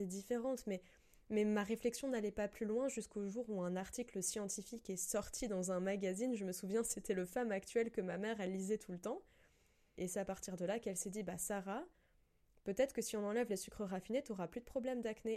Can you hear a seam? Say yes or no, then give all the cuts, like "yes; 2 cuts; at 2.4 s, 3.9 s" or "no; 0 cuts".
yes; 1 cut; at 10.0 s